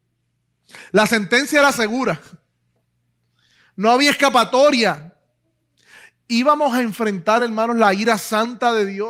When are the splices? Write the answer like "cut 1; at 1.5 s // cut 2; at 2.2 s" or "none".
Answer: none